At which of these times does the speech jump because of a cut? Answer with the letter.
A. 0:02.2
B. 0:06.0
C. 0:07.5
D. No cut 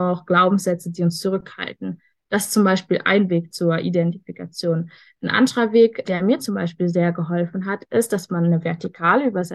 B